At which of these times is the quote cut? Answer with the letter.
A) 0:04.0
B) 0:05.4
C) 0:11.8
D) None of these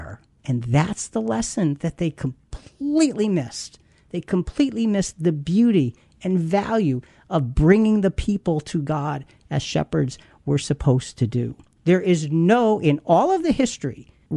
C